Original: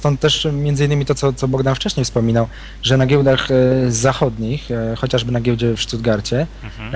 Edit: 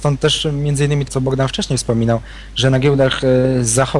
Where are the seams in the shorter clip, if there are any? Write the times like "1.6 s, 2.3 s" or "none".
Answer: 1.1 s